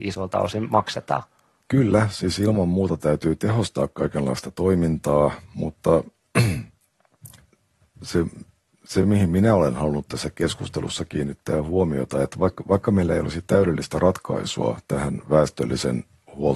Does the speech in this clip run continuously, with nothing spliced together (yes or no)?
yes